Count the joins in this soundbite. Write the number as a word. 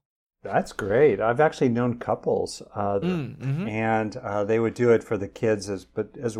one